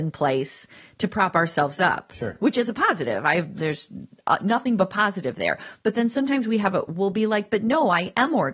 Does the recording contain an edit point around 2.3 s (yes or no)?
no